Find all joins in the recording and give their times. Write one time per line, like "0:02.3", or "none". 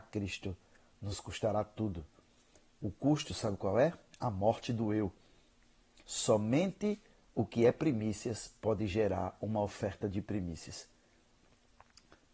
0:06.0